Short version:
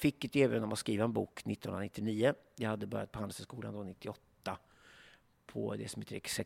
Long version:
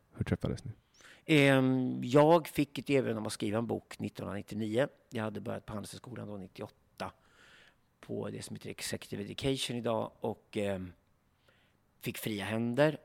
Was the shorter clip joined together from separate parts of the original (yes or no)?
no